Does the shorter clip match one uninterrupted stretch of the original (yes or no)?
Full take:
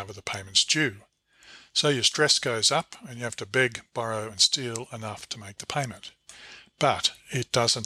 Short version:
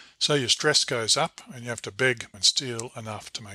no